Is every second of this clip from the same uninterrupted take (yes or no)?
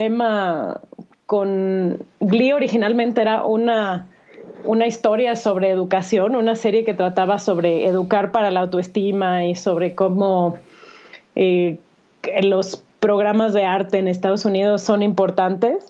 yes